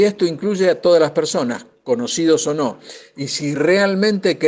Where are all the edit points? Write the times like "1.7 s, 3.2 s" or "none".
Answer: none